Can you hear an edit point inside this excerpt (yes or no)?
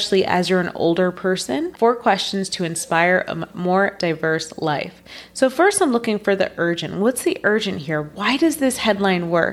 yes